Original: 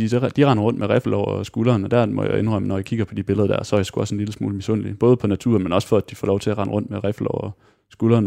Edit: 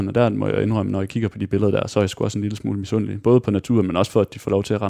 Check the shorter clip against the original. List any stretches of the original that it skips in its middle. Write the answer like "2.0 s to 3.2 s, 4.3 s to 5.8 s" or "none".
none